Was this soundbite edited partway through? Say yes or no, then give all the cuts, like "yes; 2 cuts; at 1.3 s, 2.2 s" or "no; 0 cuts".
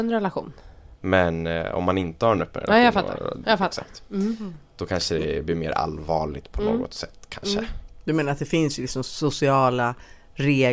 yes; 1 cut; at 1.0 s